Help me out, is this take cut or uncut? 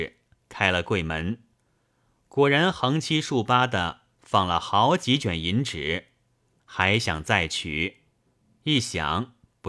cut